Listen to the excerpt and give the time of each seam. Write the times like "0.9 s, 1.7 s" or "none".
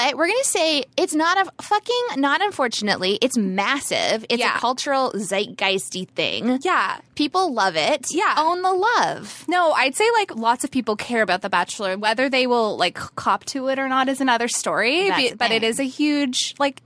none